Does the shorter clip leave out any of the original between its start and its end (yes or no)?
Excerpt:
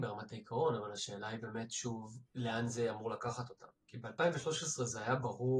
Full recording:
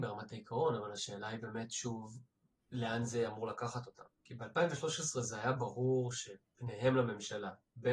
yes